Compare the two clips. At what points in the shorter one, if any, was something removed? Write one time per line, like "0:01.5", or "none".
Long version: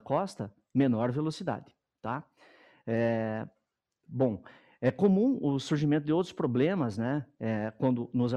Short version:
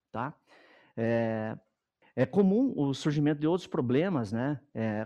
0:02.0